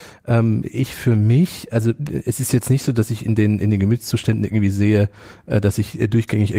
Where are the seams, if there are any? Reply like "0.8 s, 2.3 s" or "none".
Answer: none